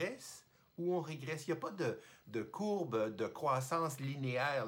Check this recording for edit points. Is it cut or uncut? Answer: uncut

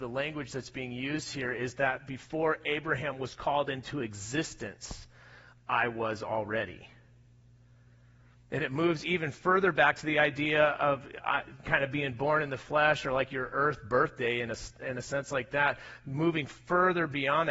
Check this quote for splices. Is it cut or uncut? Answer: uncut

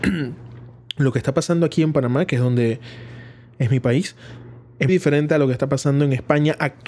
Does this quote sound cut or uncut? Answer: cut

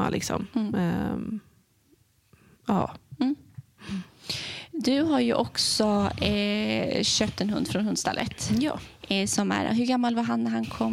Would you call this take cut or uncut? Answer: uncut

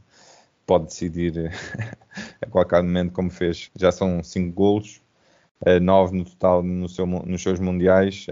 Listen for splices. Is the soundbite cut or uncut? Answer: cut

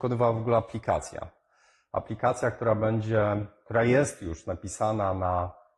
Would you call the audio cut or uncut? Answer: uncut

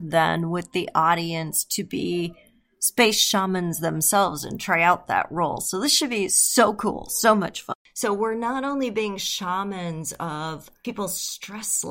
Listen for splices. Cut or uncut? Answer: uncut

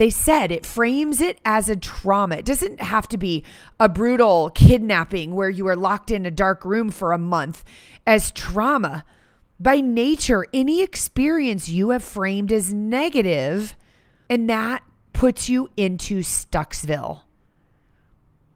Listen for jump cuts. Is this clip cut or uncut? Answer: cut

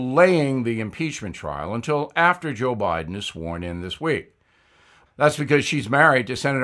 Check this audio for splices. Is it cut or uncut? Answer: cut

